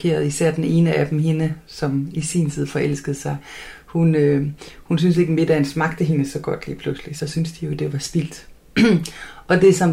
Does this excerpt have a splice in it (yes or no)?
no